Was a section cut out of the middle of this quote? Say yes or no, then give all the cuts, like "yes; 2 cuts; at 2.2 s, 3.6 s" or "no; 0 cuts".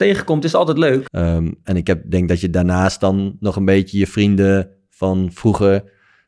yes; 1 cut; at 1.1 s